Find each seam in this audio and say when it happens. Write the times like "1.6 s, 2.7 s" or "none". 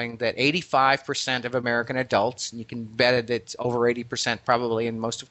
none